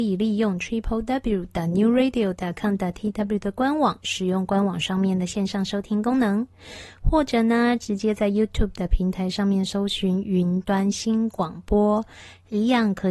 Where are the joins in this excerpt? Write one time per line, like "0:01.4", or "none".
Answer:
none